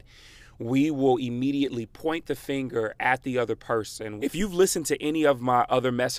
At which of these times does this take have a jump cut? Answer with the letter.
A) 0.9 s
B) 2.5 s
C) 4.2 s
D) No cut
C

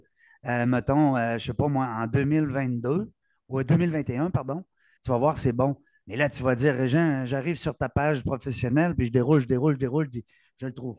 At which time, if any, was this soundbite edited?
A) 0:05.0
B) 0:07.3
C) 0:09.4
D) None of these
A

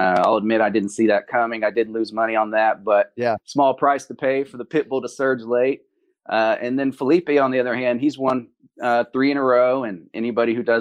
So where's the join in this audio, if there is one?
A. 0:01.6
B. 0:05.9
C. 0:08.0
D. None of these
D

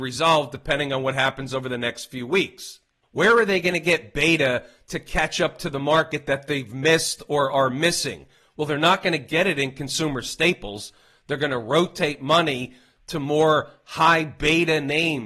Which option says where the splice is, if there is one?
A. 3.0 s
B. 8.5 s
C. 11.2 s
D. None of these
A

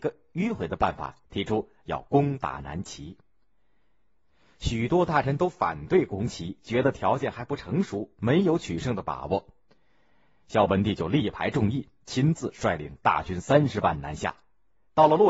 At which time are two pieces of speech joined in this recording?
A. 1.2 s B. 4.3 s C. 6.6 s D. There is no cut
A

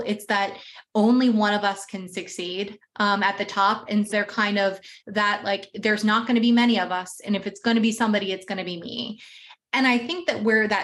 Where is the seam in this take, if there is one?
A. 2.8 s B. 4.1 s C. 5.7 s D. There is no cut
B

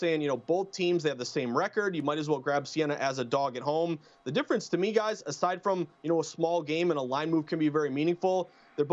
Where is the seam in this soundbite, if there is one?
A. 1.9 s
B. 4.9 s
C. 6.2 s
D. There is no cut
D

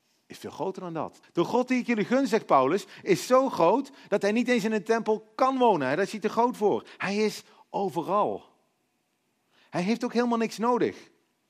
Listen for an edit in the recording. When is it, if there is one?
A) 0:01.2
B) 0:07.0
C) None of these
A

